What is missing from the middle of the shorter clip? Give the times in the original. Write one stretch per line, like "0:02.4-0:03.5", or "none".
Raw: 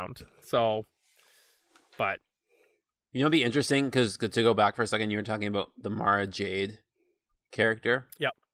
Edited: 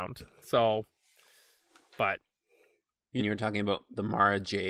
0:03.2-0:05.1